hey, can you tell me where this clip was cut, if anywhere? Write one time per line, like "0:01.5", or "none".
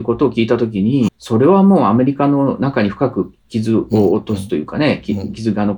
0:01.1